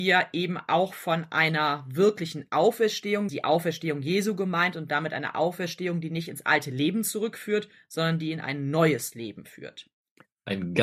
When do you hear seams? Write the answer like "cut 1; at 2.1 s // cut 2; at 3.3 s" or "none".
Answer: cut 1; at 3.3 s